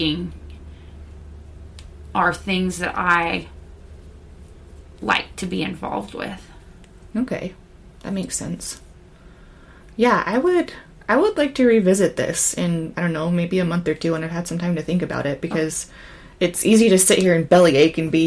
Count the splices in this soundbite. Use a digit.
1